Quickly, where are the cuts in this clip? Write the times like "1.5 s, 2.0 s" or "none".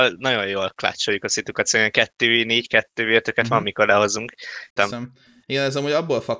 4.8 s